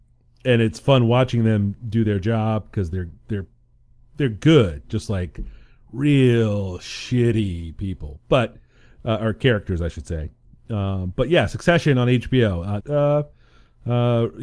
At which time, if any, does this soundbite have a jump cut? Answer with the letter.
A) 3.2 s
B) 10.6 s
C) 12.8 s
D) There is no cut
C